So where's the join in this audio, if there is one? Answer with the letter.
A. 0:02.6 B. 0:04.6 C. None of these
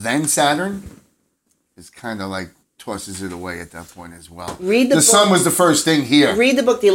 A